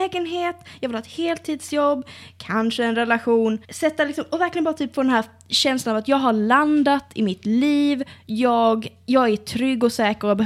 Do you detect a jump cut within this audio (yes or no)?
yes